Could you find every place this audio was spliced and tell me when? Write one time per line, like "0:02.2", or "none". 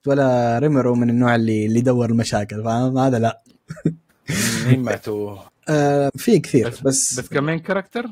0:06.1